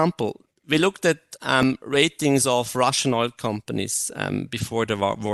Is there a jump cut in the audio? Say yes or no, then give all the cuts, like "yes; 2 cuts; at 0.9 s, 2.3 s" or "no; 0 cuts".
no; 0 cuts